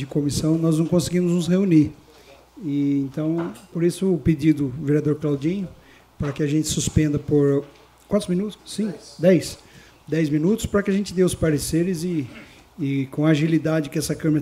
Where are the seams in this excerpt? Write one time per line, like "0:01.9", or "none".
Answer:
0:08.6